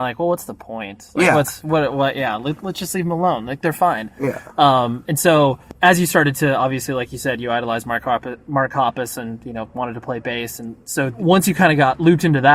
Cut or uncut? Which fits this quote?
uncut